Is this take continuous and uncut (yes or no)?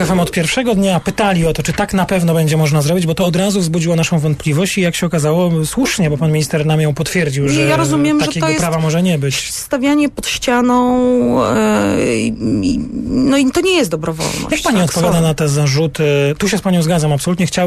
yes